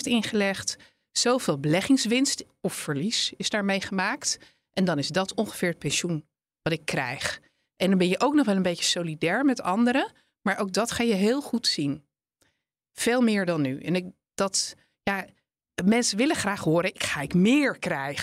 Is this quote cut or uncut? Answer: uncut